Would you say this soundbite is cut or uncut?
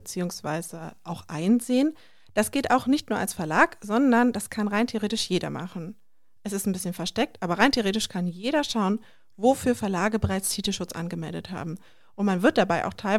uncut